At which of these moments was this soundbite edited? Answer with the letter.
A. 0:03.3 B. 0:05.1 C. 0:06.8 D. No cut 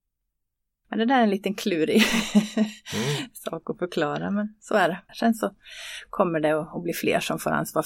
B